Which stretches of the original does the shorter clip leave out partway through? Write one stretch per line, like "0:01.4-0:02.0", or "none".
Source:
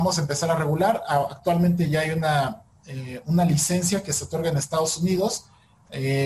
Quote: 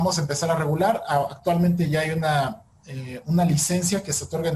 none